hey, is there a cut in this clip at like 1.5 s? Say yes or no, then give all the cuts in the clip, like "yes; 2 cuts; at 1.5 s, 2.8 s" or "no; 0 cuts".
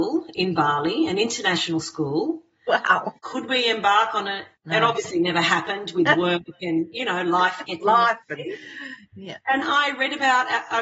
no; 3 cuts; at 3.2 s, 4.5 s, 9.6 s